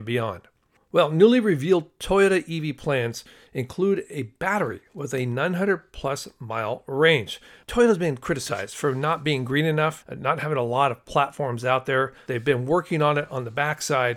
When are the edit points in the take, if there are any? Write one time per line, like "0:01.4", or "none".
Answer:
0:10.0
0:12.3